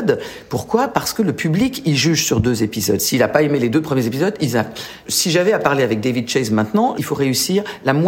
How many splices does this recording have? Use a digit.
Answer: 1